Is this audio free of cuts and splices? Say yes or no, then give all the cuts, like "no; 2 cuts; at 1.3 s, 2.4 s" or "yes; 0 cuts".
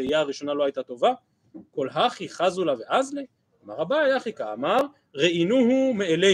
yes; 0 cuts